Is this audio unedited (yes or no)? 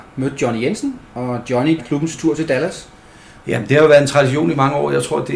no